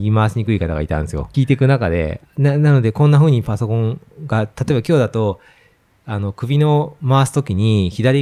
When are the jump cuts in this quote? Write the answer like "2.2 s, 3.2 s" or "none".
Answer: 1.3 s